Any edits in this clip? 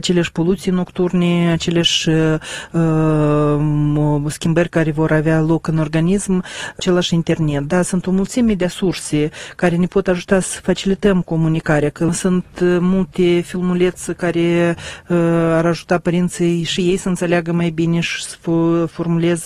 no; 0 cuts

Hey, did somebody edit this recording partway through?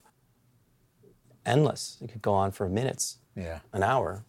no; 0 cuts

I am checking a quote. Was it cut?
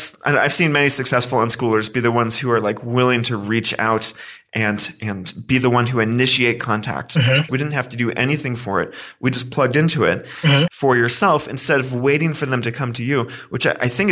yes; 2 cuts; at 7.5 s, 10.7 s

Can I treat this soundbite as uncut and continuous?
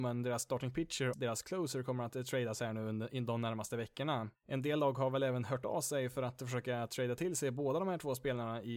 no; 1 cut; at 1.1 s

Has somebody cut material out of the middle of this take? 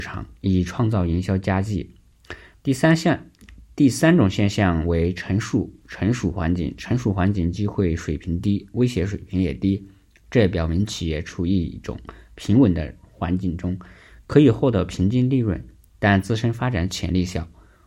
yes; 1 cut; at 2.5 s

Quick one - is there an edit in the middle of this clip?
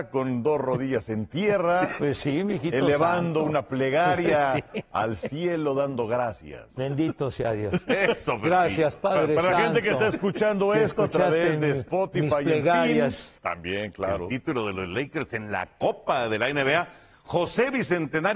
yes; 2 cuts; at 6.8 s, 13.4 s

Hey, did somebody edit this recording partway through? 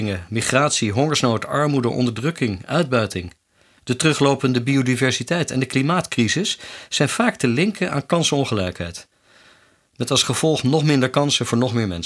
yes; 1 cut; at 3.8 s

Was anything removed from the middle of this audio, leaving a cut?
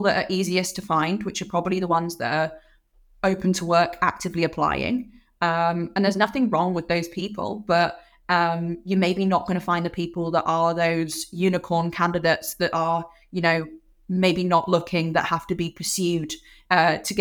no; 0 cuts

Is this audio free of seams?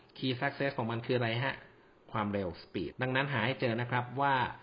no; 1 cut; at 2.9 s

